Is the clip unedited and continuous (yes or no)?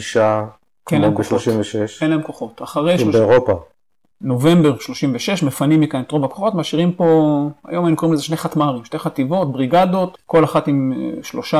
no